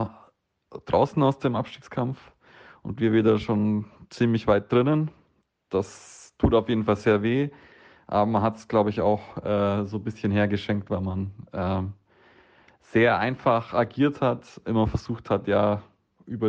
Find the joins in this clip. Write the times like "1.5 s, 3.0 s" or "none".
none